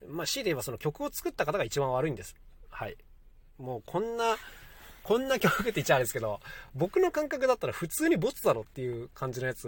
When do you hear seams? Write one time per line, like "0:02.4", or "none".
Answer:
none